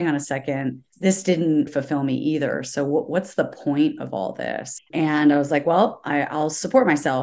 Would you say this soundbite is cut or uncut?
cut